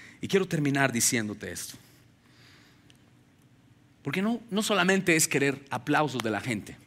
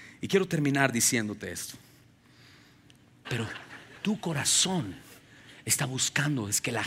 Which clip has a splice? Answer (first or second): second